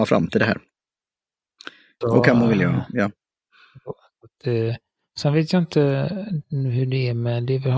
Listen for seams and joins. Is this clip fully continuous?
no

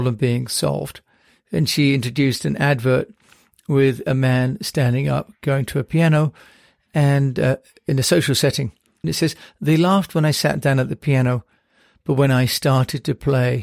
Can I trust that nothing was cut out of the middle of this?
no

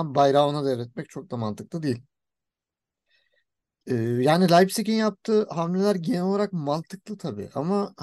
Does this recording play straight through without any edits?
yes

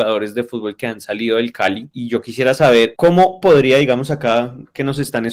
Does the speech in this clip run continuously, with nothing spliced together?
yes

